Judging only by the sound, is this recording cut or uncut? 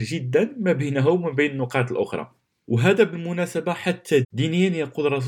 cut